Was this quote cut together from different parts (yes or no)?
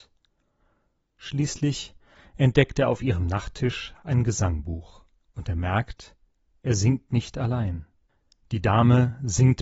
yes